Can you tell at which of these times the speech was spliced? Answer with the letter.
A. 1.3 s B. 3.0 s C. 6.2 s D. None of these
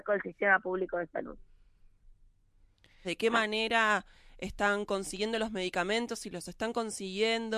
B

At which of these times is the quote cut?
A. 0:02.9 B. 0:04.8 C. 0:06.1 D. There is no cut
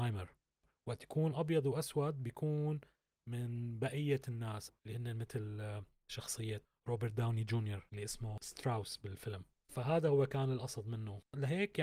B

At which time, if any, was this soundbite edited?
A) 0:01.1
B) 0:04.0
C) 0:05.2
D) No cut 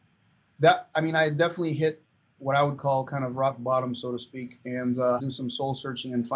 C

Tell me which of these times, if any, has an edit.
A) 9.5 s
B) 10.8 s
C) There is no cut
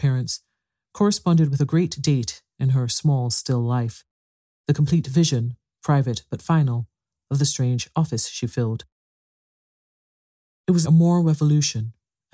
B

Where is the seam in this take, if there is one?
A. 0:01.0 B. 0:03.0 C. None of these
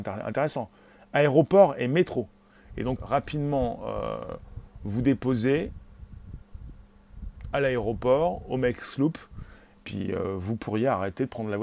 B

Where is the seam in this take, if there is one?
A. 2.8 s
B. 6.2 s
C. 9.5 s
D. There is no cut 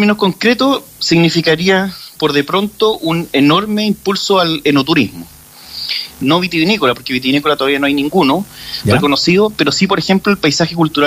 B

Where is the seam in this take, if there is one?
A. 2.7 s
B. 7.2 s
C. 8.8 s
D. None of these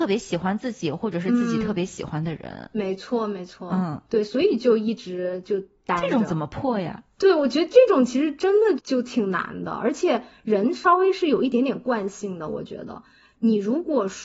C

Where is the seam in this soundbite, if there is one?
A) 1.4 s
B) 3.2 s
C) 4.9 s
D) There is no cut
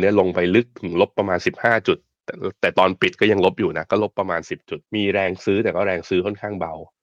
C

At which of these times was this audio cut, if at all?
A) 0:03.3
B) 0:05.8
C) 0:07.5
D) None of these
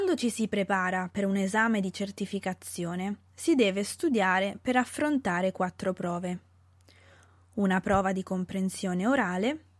A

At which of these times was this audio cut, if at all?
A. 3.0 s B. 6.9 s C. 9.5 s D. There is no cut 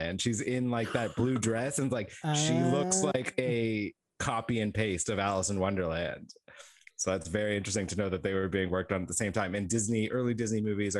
D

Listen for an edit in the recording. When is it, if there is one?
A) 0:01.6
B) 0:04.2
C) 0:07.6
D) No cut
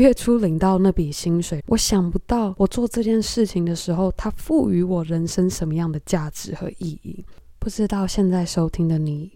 A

